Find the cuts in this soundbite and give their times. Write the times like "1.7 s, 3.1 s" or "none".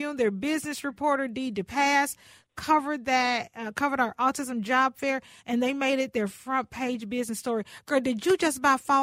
none